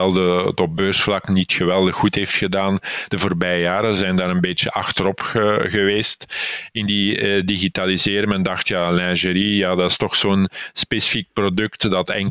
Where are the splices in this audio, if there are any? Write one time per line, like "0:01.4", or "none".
none